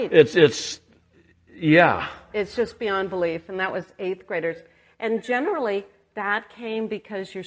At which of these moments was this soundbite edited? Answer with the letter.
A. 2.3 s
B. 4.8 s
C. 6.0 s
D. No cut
A